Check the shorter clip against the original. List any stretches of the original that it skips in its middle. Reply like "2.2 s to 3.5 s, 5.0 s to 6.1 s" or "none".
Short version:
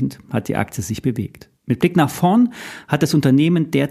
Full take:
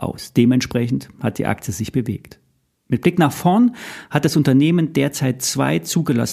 2.5 s to 2.8 s